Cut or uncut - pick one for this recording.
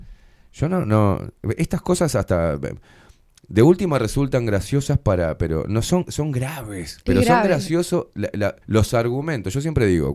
cut